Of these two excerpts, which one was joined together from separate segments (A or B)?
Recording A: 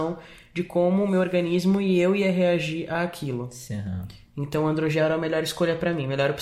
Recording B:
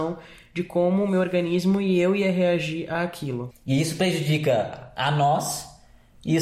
B